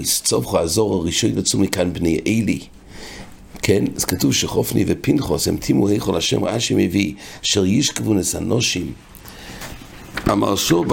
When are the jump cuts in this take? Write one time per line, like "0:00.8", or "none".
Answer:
none